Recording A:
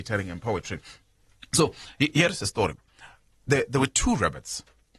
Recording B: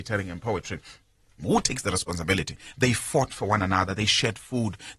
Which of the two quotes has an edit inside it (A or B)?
B